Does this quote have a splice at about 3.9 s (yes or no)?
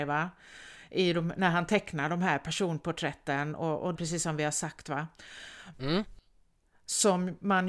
yes